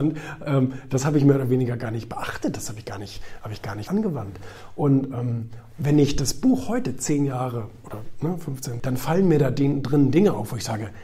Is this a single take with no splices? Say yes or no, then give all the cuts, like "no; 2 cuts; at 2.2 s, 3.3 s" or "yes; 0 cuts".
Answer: no; 2 cuts; at 3.9 s, 8.8 s